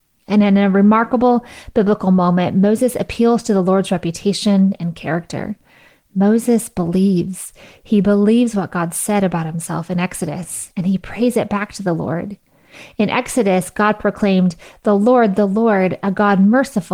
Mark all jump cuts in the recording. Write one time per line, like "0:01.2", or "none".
none